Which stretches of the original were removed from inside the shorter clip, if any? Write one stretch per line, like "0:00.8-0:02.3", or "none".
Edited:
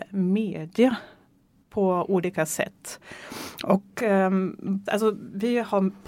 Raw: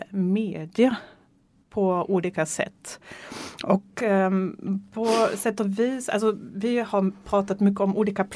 0:04.9-0:06.1